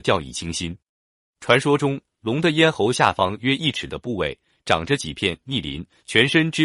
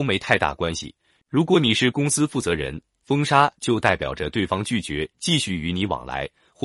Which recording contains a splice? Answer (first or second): second